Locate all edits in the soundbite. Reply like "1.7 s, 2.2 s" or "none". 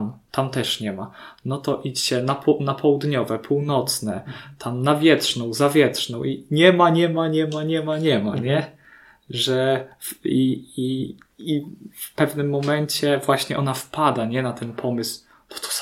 none